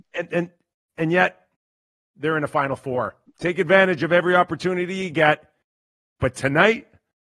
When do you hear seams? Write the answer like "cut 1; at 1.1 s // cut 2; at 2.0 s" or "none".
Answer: cut 1; at 3.3 s

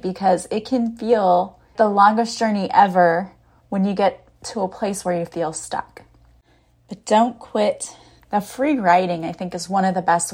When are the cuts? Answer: cut 1; at 1.8 s // cut 2; at 8.2 s

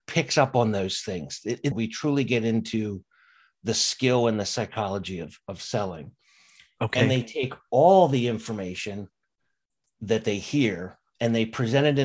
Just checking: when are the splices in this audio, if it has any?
cut 1; at 1.7 s

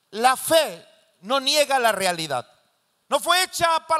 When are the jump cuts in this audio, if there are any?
cut 1; at 3.0 s

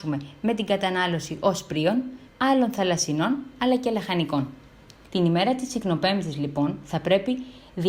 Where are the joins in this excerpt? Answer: cut 1; at 2.3 s // cut 2; at 5.1 s

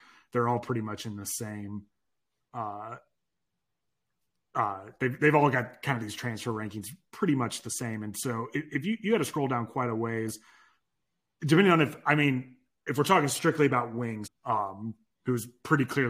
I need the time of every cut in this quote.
cut 1; at 14.2 s

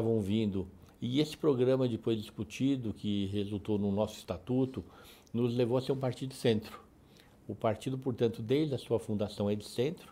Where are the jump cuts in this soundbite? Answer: cut 1; at 1.0 s

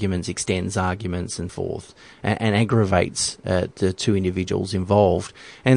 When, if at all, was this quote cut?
cut 1; at 1.5 s

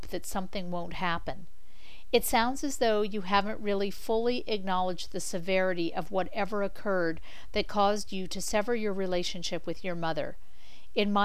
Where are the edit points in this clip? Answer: none

